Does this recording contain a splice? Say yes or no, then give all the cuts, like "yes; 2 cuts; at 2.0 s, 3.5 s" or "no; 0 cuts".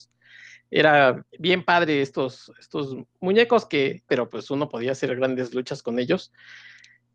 yes; 2 cuts; at 1.3 s, 4.1 s